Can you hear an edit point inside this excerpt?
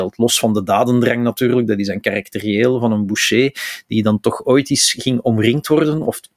no; 0 cuts

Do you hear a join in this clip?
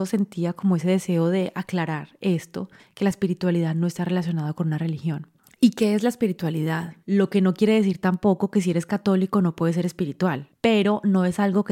yes; 2 cuts; at 7.0 s, 10.5 s

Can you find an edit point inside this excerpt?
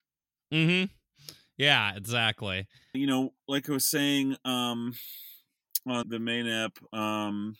yes; 2 cuts; at 2.9 s, 6.0 s

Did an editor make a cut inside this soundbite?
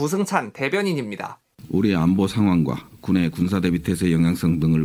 no; 0 cuts

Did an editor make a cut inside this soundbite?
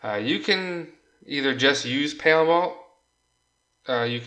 no; 0 cuts

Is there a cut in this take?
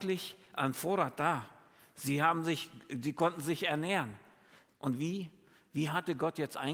yes; 1 cut; at 4.7 s

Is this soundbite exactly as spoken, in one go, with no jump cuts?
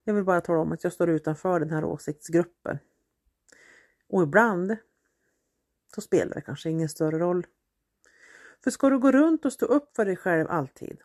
yes; 0 cuts

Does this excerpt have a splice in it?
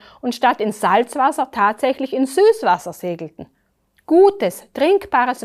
no; 0 cuts

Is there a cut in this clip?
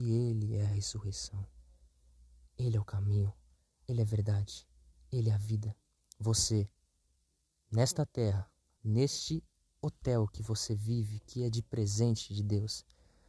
no; 0 cuts

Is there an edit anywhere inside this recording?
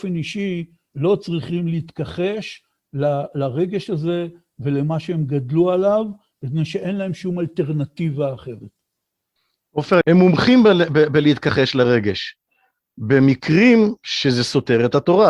yes; 1 cut; at 10.0 s

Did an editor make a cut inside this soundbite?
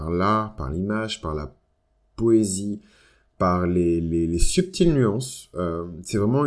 no; 0 cuts

